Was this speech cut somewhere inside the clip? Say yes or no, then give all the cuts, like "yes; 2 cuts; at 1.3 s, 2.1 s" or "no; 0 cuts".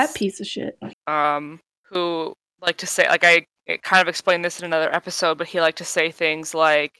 yes; 1 cut; at 0.9 s